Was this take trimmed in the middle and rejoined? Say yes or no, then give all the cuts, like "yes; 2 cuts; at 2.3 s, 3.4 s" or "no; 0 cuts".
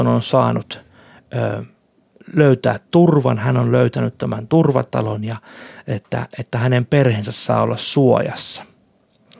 no; 0 cuts